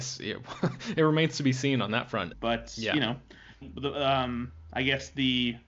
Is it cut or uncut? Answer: cut